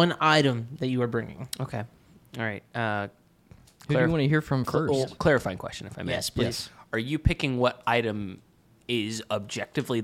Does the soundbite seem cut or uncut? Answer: uncut